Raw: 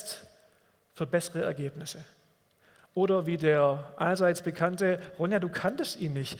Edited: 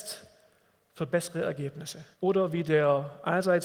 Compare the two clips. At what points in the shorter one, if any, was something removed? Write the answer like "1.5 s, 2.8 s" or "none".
2.1 s